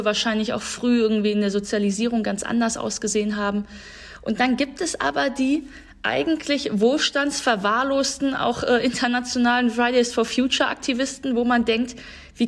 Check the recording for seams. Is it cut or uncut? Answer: uncut